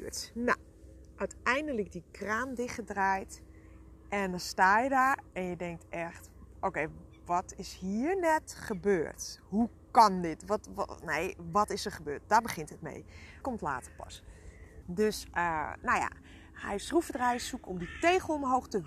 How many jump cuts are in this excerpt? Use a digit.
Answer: 2